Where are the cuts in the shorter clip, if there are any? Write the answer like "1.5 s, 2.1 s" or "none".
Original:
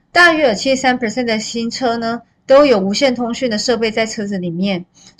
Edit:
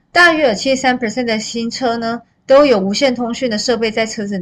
none